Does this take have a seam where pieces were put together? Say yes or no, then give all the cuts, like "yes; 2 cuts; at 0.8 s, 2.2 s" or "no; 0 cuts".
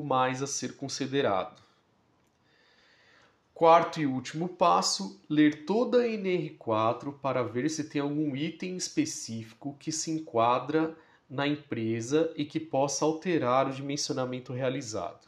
no; 0 cuts